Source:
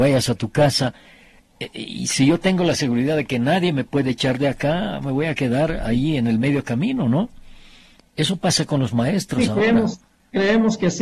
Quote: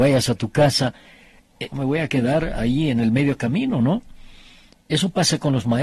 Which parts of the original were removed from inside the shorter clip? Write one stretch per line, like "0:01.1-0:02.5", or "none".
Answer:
0:01.7-0:05.0